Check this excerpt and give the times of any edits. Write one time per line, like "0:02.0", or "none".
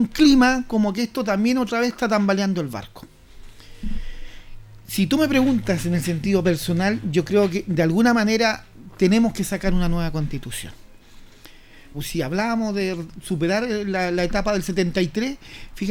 0:11.9